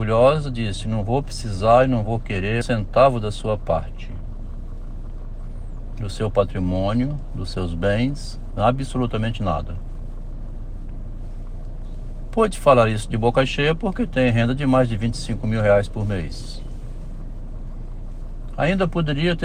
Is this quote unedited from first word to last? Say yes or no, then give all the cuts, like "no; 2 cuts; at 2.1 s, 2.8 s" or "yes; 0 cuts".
no; 1 cut; at 2.6 s